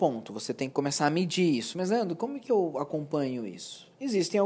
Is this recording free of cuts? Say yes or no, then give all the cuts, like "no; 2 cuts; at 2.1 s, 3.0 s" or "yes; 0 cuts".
yes; 0 cuts